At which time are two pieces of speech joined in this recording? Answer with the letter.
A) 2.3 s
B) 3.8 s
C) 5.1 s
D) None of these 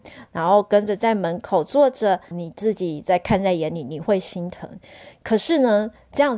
A